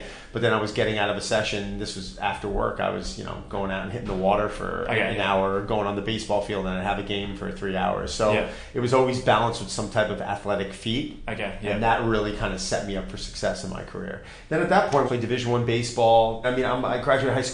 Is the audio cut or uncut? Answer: cut